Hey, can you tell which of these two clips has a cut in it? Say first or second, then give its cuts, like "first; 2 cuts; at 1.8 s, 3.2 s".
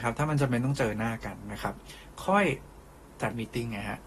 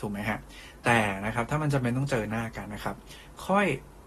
second; 1 cut; at 2.7 s